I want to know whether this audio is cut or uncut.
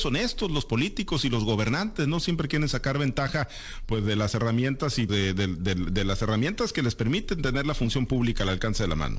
cut